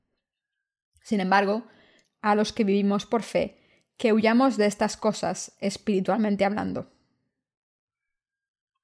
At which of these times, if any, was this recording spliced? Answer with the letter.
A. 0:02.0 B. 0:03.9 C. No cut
A